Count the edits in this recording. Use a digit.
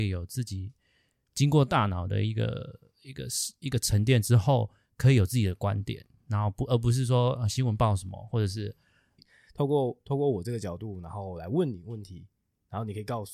1